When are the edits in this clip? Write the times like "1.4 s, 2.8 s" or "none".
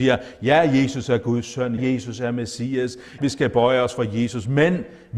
1.8 s, 3.2 s